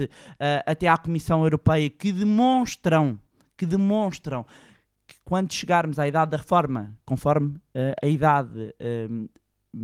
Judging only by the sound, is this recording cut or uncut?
uncut